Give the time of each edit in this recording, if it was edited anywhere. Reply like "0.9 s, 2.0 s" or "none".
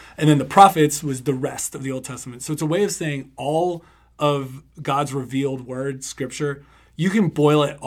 none